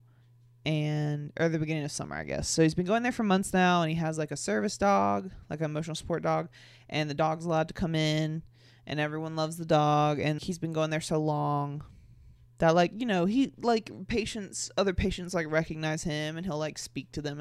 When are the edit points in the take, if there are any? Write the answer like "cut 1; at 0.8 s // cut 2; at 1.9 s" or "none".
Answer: cut 1; at 10.4 s

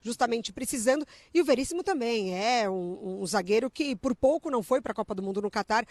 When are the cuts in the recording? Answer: none

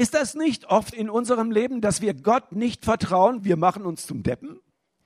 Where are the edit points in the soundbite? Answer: cut 1; at 0.9 s // cut 2; at 3.4 s

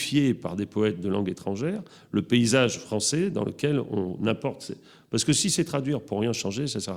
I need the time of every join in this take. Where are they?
none

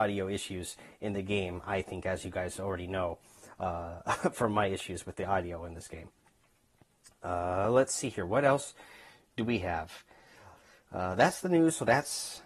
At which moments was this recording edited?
none

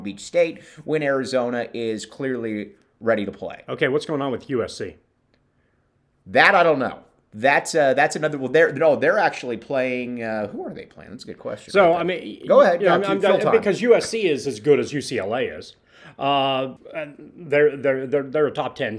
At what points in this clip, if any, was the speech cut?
cut 1; at 16.8 s

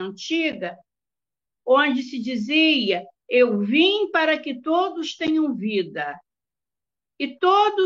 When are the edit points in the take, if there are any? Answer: cut 1; at 1.5 s

